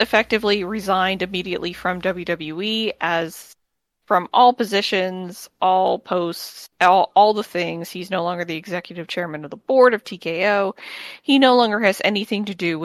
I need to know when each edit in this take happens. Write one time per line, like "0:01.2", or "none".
none

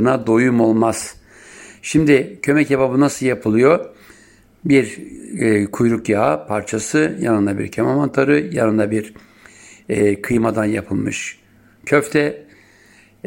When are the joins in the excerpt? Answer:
none

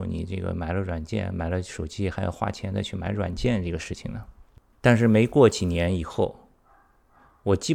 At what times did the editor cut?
none

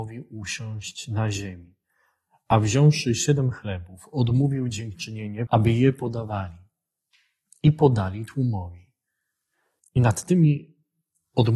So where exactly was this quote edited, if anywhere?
0:05.5
0:09.8

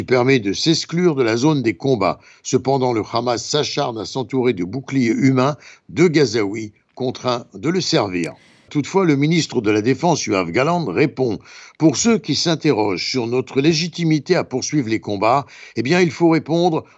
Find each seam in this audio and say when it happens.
0:08.7

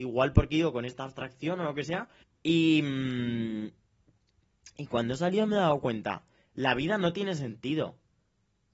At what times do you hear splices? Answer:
0:02.2

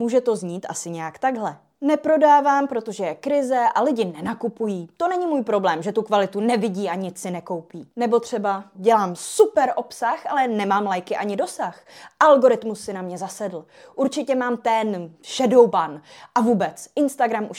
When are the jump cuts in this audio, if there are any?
0:08.7

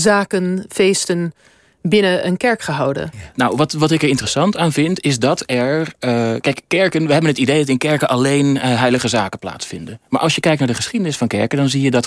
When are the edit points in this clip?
none

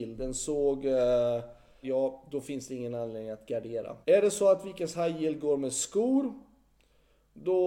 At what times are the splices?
0:01.8
0:04.0

